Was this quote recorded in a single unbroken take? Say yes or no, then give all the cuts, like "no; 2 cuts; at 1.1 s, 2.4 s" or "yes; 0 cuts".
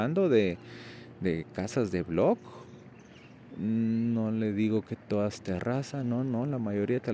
yes; 0 cuts